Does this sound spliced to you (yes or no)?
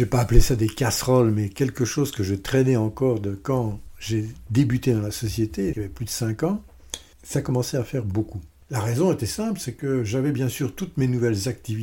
yes